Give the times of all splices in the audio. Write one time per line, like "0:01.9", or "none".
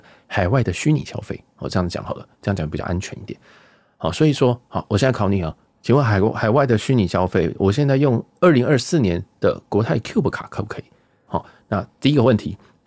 0:11.3